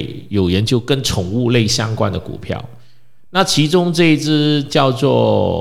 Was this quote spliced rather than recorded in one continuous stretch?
no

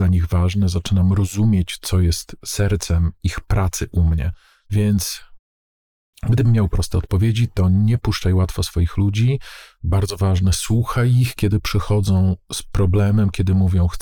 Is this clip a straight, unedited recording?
yes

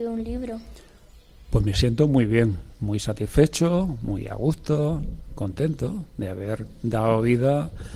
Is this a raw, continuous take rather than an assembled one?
yes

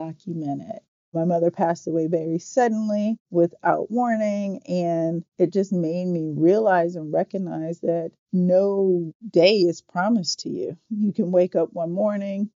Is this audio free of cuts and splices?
no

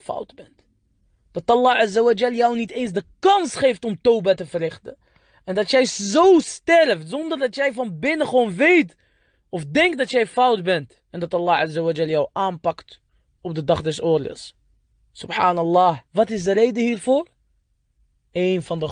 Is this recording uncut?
no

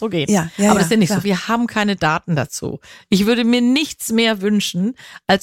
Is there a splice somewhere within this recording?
yes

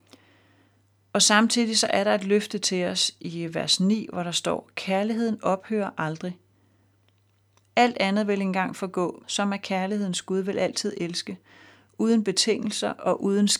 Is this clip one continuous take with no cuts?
no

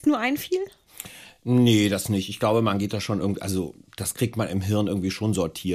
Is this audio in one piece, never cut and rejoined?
yes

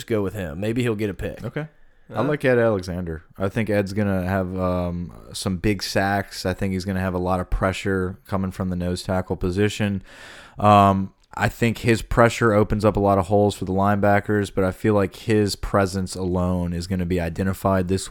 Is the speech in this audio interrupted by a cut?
yes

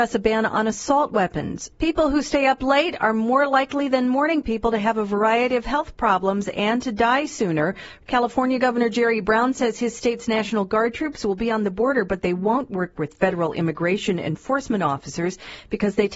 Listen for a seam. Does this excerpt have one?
yes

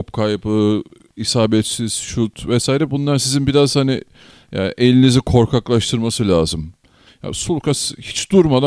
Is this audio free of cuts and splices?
no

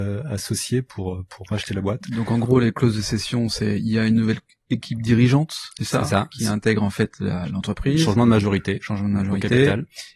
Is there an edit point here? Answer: no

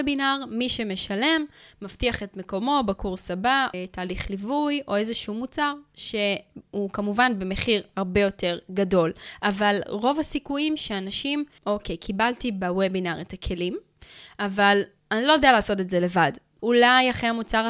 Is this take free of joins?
no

